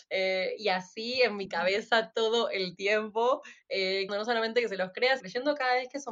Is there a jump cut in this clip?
yes; 2 cuts; at 4.1 s, 5.2 s

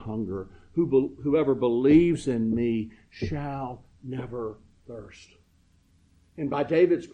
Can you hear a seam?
no; 0 cuts

